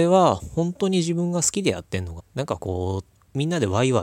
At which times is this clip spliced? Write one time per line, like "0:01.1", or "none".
0:02.2